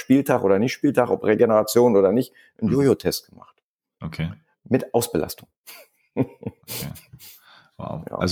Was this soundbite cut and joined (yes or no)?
no